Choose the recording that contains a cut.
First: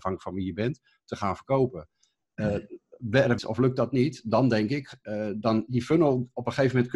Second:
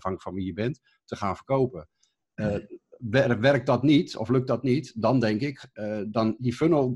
first; 1 cut; at 3.4 s

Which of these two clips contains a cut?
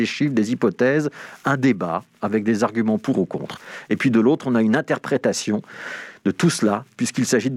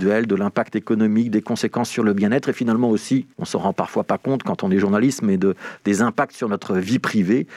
second; 1 cut; at 3.3 s

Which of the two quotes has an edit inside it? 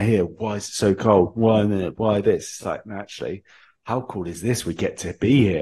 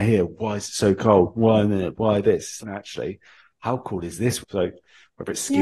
second; 2 cuts; at 2.6 s, 4.4 s

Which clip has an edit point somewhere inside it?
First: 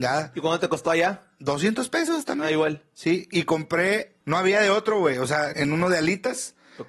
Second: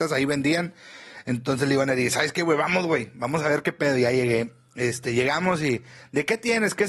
first; 2 cuts; at 4.2 s, 5.5 s

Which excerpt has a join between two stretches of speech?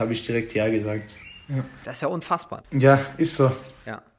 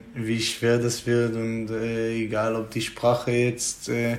first; 2 cuts; at 1.5 s, 2.6 s

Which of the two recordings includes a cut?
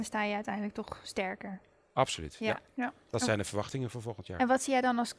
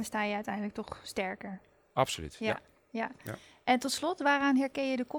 first; 1 cut; at 2.8 s

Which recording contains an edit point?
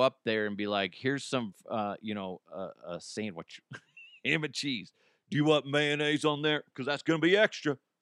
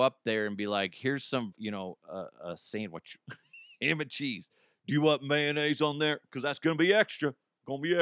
second; 1 cut; at 1.6 s

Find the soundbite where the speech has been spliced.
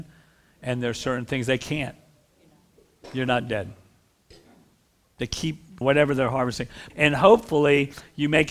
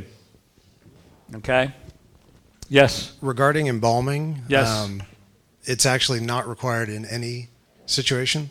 first; 2 cuts; at 5.8 s, 6.9 s

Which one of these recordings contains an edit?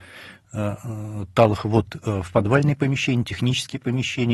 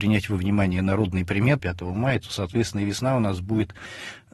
second; 1 cut; at 1.6 s

